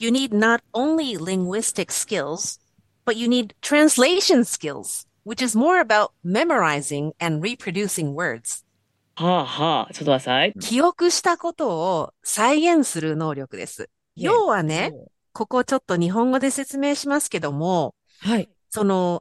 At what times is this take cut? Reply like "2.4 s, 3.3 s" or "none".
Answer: 9.2 s, 10.5 s, 14.2 s